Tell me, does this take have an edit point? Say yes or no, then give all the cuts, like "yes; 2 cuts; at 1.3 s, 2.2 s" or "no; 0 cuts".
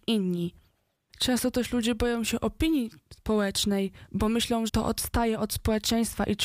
yes; 2 cuts; at 1.1 s, 4.7 s